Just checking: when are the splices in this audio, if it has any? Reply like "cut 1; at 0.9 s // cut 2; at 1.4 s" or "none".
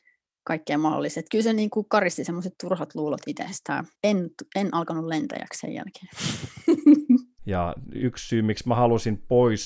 cut 1; at 3.9 s // cut 2; at 7.4 s